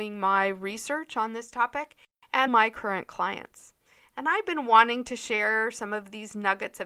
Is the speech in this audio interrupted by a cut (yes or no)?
yes